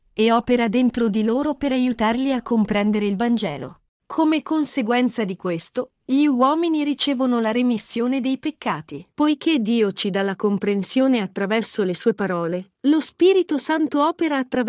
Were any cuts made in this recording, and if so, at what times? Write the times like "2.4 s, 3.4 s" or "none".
9.1 s